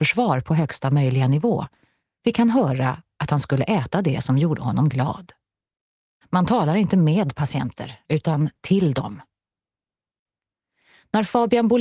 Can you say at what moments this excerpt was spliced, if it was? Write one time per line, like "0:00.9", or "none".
0:06.2